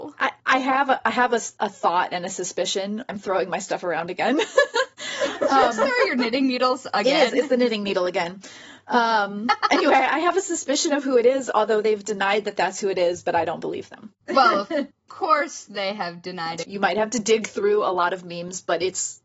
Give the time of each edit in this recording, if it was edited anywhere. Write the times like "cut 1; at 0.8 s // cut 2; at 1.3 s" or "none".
cut 1; at 3.1 s // cut 2; at 14.2 s // cut 3; at 16.6 s